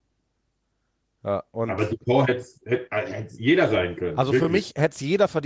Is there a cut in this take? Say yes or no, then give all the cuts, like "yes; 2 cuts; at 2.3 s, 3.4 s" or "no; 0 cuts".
no; 0 cuts